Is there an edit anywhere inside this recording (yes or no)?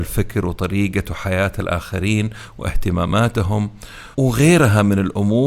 yes